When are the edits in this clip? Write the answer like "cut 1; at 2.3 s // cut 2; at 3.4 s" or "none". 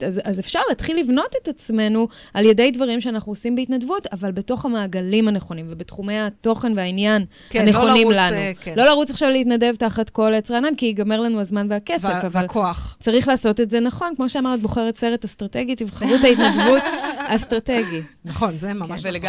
none